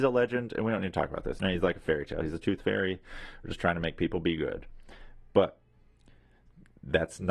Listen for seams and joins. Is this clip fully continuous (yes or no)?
no